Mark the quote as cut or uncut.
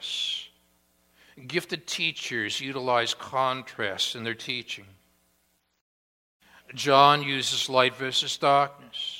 uncut